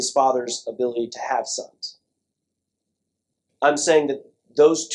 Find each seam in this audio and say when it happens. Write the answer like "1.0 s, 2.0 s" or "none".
3.5 s